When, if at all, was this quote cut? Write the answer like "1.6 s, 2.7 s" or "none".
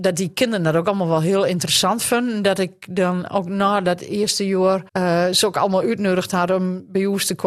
4.9 s